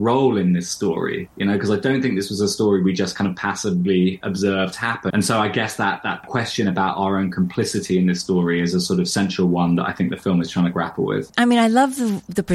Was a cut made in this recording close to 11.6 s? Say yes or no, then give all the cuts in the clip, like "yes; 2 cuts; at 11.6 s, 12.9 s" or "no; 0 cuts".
no; 1 cut; at 5.1 s